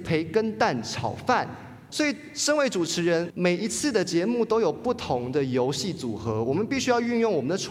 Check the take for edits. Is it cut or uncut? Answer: cut